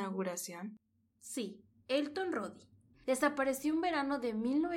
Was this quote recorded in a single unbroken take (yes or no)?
no